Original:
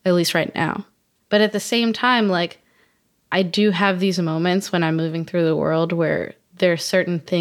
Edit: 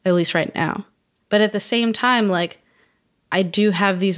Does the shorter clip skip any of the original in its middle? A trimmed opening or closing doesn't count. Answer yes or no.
no